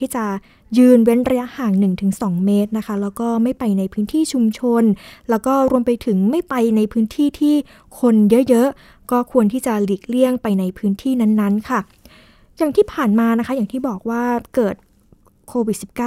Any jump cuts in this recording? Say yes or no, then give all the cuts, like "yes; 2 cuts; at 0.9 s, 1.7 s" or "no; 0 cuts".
no; 0 cuts